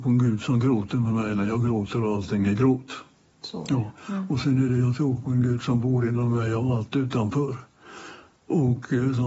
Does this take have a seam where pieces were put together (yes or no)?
no